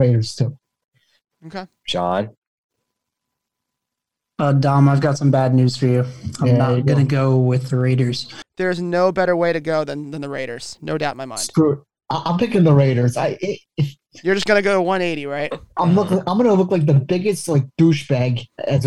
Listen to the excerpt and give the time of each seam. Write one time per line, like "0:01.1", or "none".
0:08.4